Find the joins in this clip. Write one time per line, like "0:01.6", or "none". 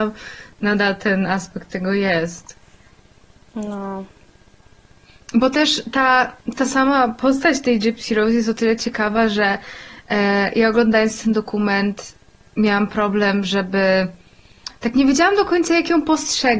none